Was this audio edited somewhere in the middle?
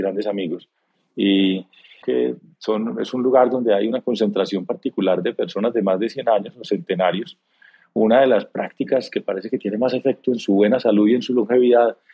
yes; 1 cut; at 2.0 s

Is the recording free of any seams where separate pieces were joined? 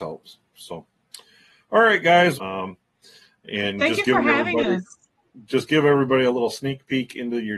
no; 1 cut; at 2.4 s

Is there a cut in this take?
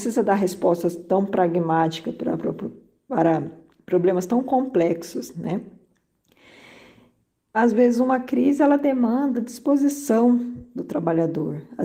no; 0 cuts

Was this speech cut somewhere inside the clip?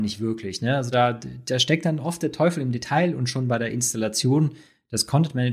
no; 0 cuts

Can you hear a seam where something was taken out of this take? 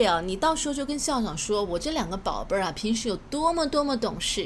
no; 0 cuts

